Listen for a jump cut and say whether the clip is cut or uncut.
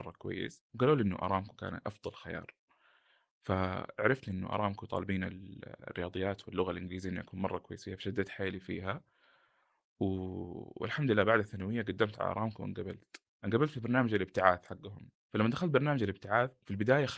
uncut